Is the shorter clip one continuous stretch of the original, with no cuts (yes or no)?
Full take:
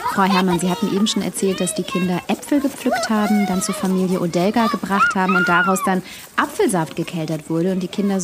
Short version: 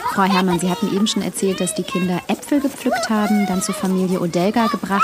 yes